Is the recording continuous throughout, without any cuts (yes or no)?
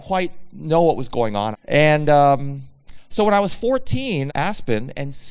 no